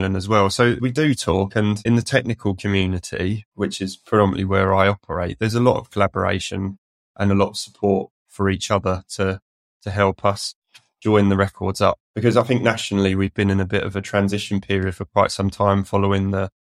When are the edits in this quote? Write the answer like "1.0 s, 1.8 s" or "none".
none